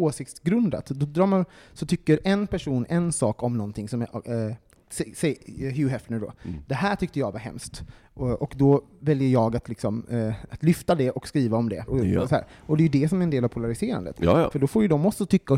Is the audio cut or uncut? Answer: cut